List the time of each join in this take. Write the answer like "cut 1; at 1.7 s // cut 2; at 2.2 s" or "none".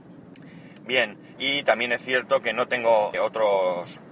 cut 1; at 1.4 s // cut 2; at 3.1 s